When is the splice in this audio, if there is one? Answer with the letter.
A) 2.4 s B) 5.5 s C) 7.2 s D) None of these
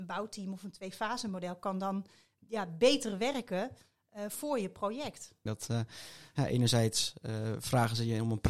B